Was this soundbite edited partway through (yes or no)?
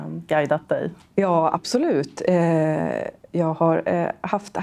no